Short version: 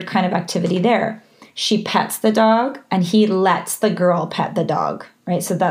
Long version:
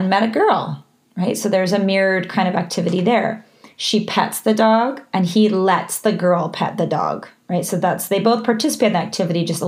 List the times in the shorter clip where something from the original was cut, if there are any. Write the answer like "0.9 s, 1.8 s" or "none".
none